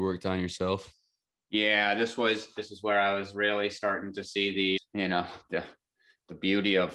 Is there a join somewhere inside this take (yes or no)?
yes